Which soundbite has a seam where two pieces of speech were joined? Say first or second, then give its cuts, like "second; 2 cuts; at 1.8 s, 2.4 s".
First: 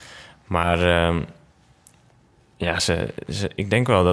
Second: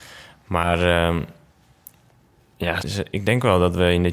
second; 1 cut; at 2.8 s